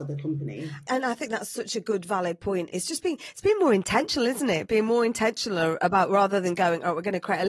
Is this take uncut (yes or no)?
yes